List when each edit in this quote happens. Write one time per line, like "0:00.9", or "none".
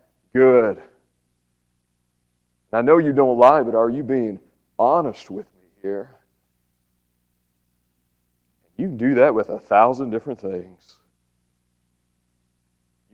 none